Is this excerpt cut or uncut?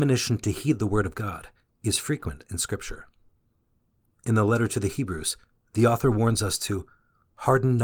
uncut